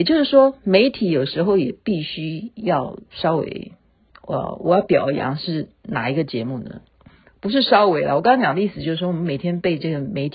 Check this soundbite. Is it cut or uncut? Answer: uncut